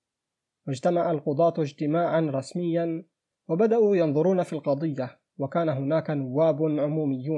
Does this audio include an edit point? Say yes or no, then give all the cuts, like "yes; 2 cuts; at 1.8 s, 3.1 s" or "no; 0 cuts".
no; 0 cuts